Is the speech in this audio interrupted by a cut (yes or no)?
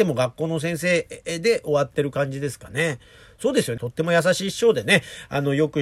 yes